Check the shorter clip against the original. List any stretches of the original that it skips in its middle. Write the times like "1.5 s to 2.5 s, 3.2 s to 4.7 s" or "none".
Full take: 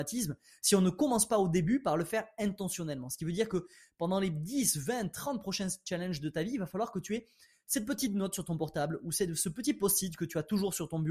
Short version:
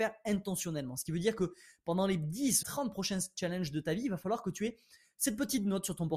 4.7 s to 5.1 s